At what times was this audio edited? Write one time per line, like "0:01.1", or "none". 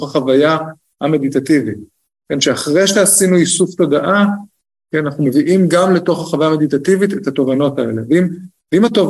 none